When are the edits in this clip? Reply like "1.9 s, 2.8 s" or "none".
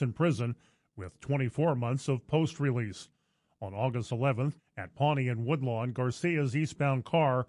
4.6 s